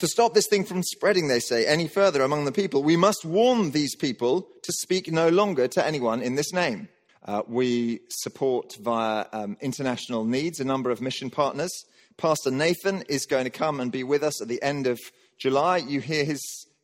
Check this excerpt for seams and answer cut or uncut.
cut